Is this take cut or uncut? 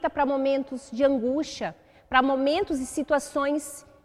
uncut